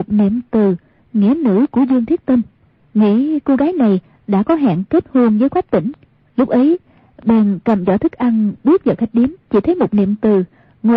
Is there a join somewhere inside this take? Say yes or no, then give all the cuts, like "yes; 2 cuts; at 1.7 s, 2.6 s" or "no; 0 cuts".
yes; 2 cuts; at 6.2 s, 9.4 s